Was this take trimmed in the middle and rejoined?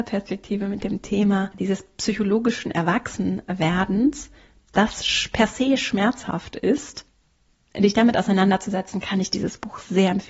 no; 0 cuts

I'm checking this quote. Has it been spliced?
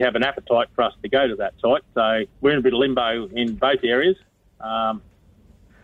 yes; 1 cut; at 2.3 s

